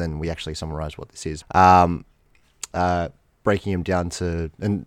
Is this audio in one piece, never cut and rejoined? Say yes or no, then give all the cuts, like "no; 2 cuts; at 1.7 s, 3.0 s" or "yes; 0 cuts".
no; 2 cuts; at 1.4 s, 2.7 s